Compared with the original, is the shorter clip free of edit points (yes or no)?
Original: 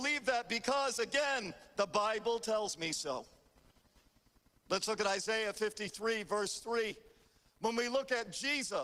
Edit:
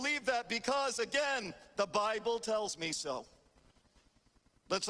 yes